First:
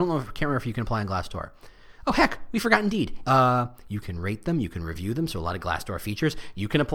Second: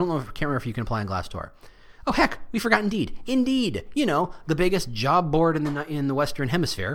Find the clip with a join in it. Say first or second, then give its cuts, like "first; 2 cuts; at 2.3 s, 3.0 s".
first; 1 cut; at 3.2 s